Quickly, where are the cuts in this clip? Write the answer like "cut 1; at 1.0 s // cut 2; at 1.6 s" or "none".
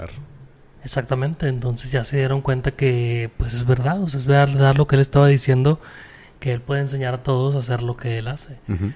none